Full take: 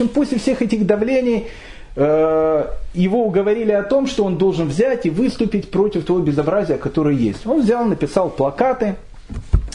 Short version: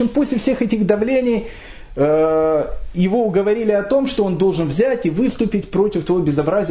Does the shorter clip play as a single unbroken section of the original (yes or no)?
yes